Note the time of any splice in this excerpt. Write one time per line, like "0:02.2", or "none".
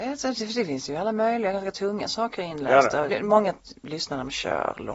0:03.1